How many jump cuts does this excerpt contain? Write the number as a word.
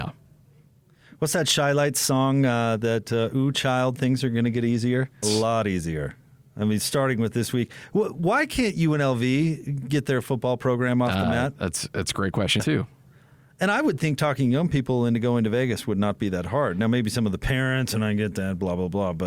two